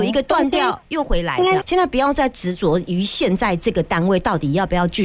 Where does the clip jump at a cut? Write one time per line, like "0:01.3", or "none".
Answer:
0:01.6